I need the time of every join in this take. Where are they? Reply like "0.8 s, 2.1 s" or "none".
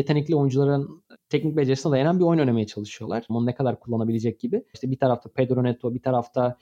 3.3 s, 4.7 s